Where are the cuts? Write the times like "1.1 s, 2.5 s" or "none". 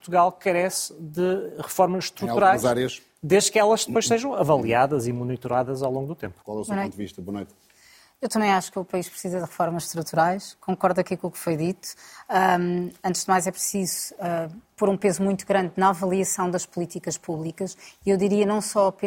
6.4 s